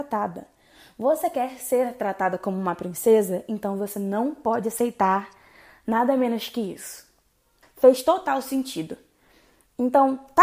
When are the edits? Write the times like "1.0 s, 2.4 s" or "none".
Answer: 7.6 s